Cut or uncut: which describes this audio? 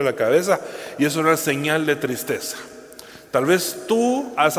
uncut